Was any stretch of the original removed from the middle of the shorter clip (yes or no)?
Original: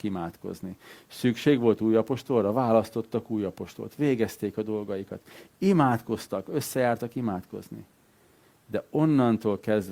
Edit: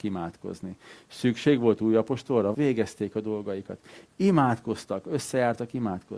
yes